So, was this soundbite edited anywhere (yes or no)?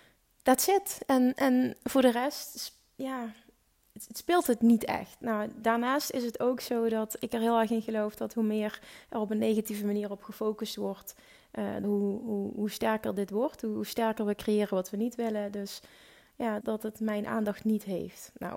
yes